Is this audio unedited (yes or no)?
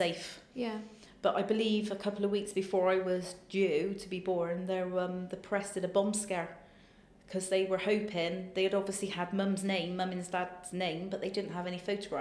yes